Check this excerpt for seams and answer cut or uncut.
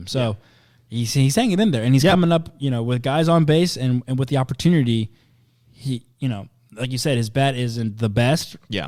uncut